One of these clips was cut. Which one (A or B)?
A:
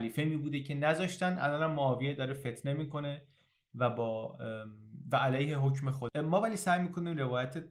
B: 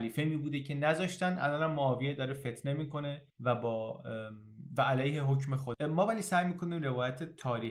B